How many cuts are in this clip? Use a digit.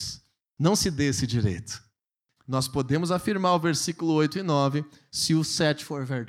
1